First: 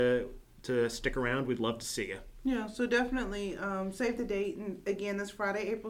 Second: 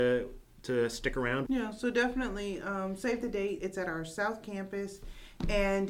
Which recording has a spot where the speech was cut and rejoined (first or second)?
second